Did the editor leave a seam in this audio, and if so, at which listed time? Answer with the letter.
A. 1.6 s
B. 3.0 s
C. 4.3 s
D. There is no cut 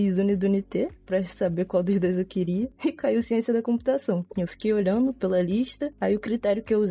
C